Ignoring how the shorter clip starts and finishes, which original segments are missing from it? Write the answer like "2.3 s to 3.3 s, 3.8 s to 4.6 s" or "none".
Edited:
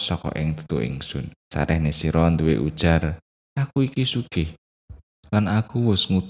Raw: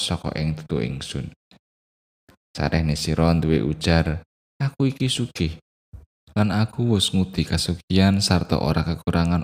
1.4 s to 2.4 s